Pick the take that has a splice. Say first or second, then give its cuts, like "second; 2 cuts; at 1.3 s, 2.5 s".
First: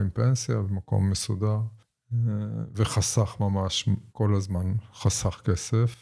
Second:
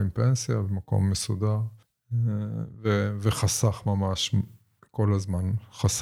first; 2 cuts; at 2.7 s, 4.1 s